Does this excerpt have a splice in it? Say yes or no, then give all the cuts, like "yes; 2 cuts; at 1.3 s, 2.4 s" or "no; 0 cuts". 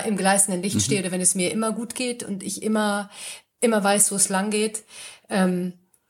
no; 0 cuts